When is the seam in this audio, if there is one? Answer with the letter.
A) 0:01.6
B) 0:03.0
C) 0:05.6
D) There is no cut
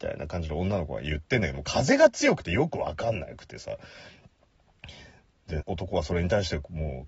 C